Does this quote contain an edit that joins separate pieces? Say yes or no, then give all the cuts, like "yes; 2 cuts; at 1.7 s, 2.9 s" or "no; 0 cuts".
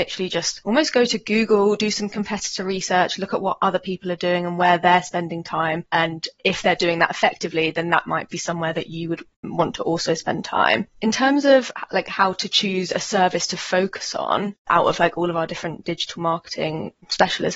no; 0 cuts